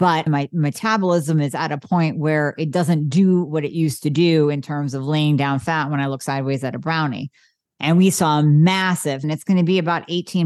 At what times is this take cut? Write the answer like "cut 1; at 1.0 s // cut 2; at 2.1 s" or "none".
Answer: cut 1; at 7.7 s // cut 2; at 9.2 s